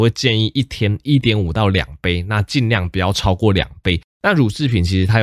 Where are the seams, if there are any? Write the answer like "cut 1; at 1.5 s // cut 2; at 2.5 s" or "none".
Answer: cut 1; at 4.1 s